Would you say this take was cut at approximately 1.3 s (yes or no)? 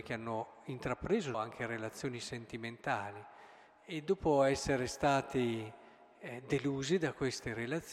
yes